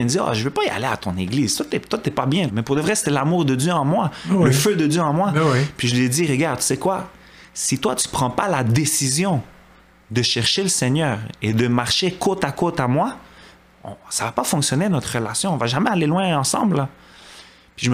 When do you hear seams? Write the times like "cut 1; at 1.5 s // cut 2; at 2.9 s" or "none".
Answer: cut 1; at 2.5 s